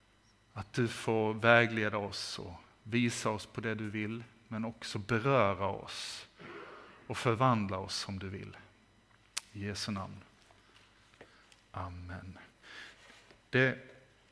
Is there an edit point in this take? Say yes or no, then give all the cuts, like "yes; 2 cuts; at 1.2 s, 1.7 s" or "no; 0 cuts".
no; 0 cuts